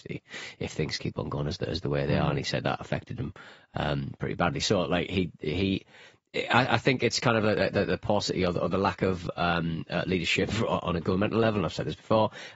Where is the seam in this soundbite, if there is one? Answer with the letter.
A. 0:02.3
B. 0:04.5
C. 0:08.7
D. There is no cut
D